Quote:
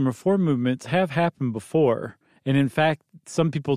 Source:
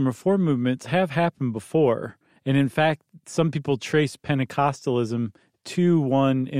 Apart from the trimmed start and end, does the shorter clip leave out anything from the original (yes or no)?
no